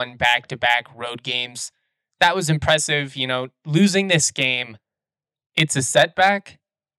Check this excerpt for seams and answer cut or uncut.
uncut